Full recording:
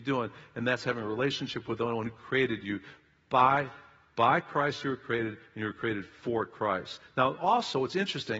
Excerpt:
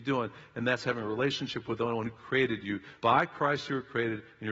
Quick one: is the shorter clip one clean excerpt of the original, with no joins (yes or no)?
no